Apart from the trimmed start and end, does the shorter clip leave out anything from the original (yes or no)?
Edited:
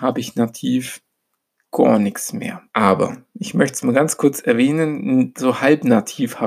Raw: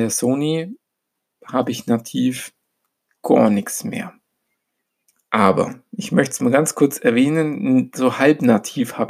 yes